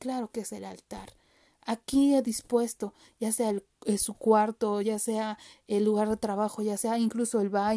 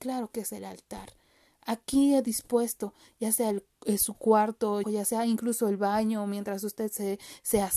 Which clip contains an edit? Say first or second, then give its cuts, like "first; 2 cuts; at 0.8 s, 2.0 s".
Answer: second; 1 cut; at 4.8 s